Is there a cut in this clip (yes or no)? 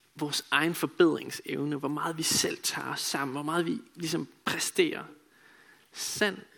no